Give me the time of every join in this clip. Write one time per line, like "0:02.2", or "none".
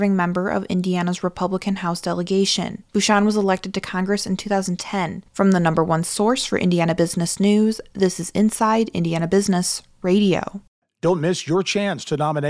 0:02.9
0:05.3